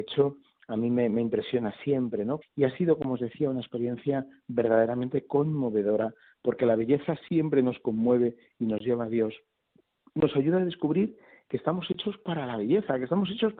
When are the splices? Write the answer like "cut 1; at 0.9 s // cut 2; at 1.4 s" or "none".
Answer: cut 1; at 2.4 s